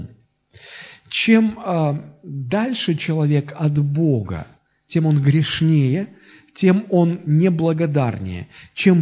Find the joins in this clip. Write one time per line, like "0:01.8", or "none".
none